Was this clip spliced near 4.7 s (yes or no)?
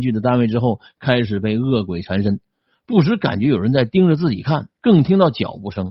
yes